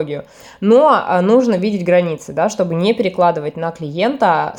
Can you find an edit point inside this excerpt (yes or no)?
no